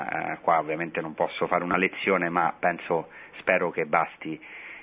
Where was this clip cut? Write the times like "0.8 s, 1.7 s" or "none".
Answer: none